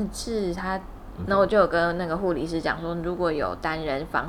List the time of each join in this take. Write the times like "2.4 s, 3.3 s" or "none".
1.2 s